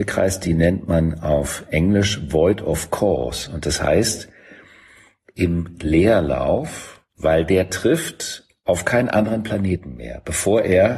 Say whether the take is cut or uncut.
cut